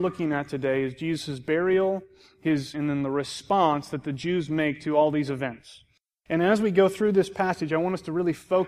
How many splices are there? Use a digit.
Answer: 1